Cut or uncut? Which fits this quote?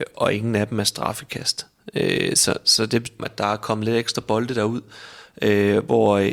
cut